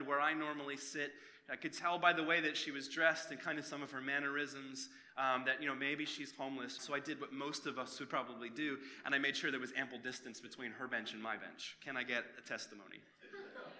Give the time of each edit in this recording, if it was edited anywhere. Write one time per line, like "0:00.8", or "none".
0:06.8